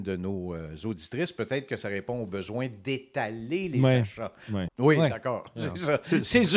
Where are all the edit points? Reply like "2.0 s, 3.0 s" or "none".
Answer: 4.7 s